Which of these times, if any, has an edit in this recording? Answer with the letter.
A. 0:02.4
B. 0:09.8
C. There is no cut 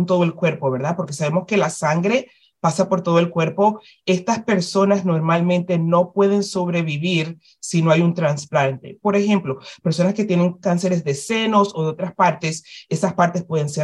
C